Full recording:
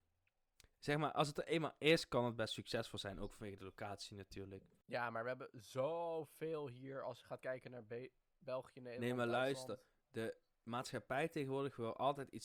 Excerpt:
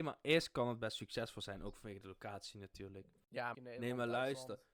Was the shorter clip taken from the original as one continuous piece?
no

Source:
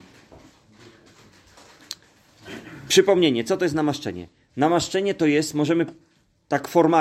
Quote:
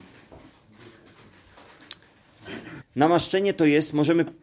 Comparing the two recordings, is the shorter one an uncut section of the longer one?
no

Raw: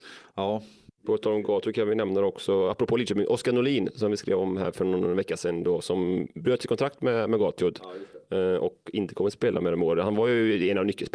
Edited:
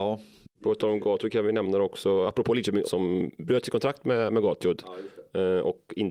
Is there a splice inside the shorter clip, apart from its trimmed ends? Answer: yes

